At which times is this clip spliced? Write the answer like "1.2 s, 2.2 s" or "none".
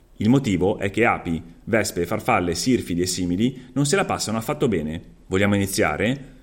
5.3 s